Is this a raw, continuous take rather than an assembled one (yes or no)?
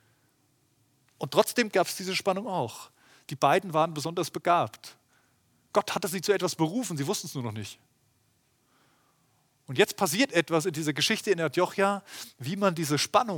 no